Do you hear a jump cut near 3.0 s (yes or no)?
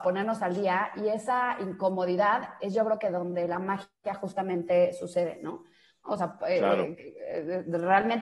no